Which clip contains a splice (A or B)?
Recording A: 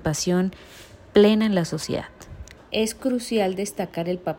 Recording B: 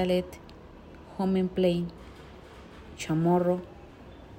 A